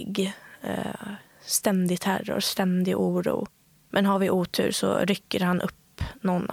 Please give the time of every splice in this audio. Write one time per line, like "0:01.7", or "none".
0:03.8